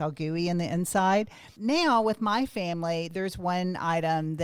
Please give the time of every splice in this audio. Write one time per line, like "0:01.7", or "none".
none